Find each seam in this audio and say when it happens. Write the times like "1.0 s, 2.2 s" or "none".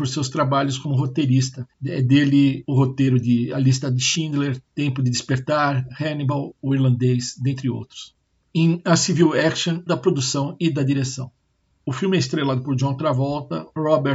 9.9 s